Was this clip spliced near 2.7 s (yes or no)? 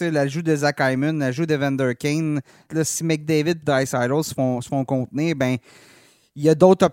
yes